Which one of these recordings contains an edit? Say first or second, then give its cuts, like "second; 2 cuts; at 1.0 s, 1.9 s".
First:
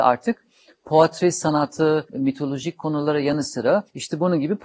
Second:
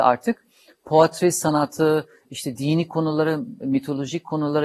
first; 1 cut; at 2.1 s